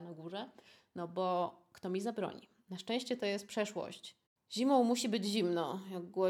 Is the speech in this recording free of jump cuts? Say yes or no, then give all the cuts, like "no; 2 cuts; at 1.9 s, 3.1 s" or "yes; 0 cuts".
yes; 0 cuts